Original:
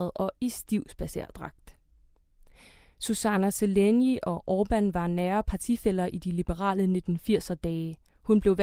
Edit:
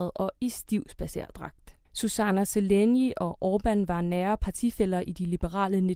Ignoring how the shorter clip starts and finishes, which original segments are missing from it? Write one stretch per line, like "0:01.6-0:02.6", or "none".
0:01.9-0:02.9